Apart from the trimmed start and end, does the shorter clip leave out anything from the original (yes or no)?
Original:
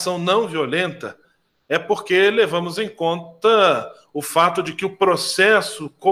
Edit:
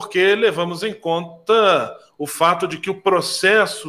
no